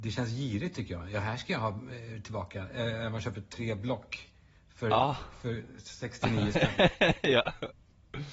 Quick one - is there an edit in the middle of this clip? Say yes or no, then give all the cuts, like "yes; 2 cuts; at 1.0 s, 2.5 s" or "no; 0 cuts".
no; 0 cuts